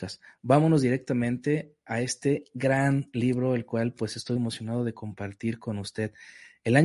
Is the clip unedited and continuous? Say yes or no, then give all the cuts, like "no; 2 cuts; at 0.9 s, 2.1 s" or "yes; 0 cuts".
no; 1 cut; at 4.4 s